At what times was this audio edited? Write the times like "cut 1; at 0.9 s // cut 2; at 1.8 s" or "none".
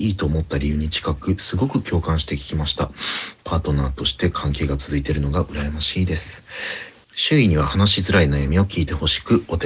cut 1; at 7.0 s